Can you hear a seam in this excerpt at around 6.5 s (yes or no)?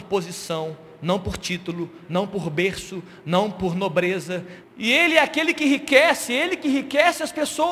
no